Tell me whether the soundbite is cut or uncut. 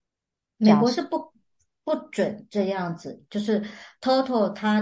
cut